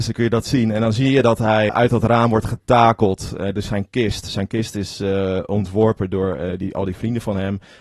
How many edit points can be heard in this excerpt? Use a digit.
1